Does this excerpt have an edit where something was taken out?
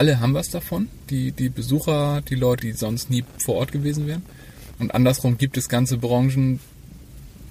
yes; 2 cuts; at 2.6 s, 4.8 s

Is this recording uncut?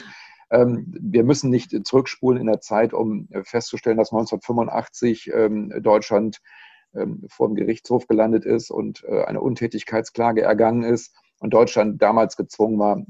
yes; 0 cuts

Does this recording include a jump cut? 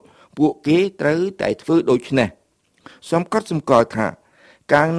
no; 0 cuts

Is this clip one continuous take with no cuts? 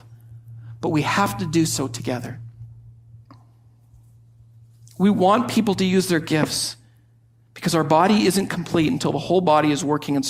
yes; 0 cuts

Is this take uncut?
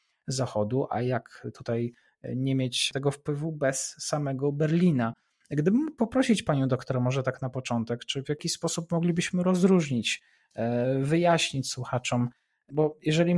yes; 0 cuts

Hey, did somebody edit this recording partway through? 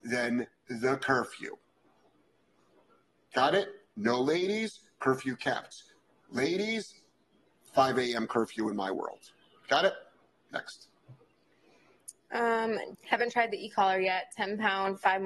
yes; 1 cut; at 12.9 s

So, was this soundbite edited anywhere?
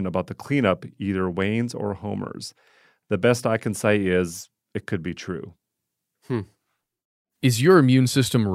no; 0 cuts

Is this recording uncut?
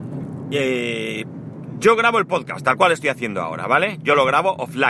yes; 0 cuts

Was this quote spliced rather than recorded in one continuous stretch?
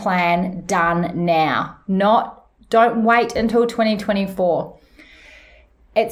no; 0 cuts

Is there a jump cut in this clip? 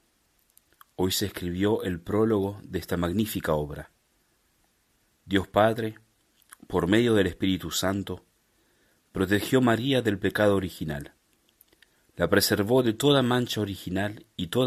no; 0 cuts

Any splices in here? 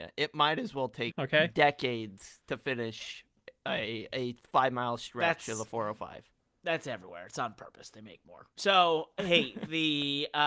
yes; 1 cut; at 1.1 s

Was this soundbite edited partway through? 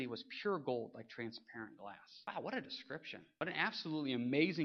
no; 0 cuts

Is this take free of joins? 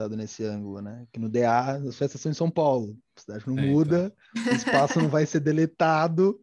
yes; 0 cuts

